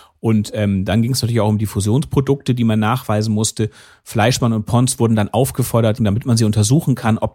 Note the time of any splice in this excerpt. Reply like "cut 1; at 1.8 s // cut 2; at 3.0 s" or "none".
cut 1; at 6.0 s